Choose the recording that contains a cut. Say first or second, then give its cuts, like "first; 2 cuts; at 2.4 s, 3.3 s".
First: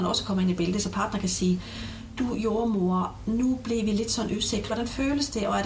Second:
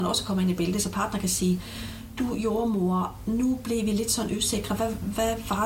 first; 1 cut; at 4.7 s